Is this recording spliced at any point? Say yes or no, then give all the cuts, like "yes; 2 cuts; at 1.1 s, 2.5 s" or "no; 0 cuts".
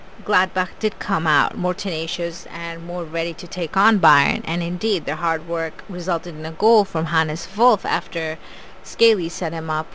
no; 0 cuts